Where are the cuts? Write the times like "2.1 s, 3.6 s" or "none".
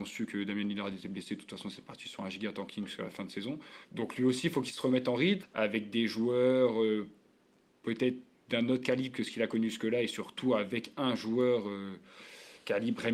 3.8 s, 5.4 s